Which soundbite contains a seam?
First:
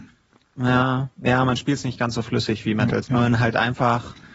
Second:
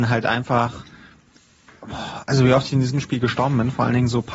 first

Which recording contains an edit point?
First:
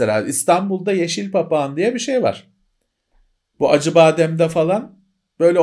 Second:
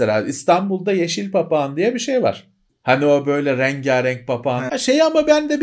second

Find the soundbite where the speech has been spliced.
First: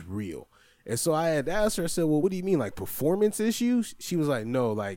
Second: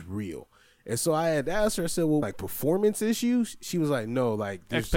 second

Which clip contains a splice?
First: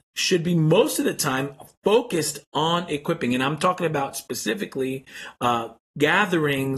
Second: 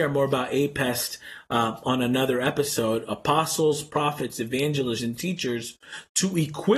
second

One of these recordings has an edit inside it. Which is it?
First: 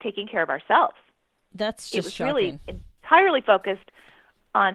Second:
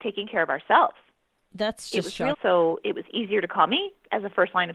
second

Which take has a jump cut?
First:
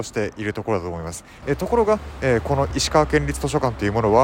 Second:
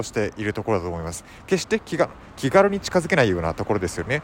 first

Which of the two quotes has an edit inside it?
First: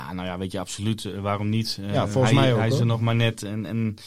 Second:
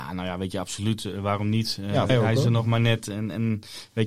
second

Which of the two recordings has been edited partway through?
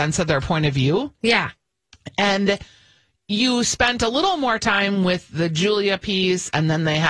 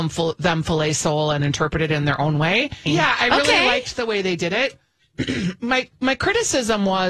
second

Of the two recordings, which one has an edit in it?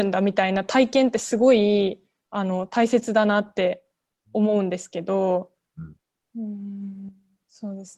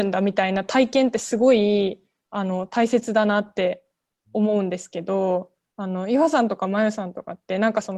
first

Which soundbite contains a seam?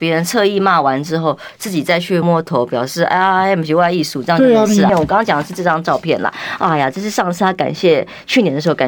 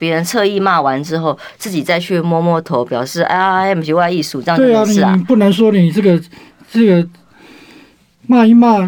first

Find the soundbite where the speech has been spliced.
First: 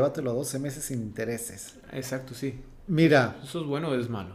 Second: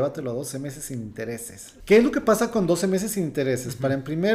second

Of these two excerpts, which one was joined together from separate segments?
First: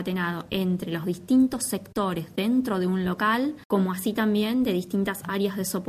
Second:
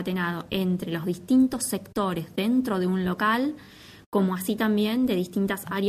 first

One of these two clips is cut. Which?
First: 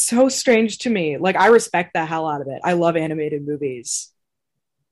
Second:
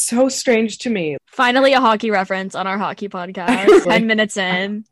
second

